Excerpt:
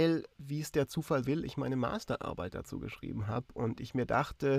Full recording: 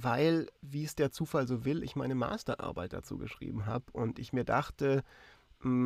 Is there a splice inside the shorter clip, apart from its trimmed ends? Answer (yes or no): yes